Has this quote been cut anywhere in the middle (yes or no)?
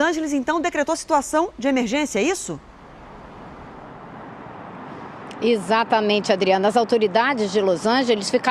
no